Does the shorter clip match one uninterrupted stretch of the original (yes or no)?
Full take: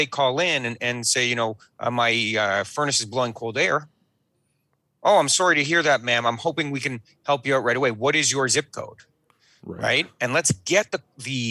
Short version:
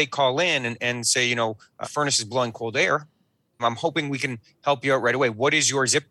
no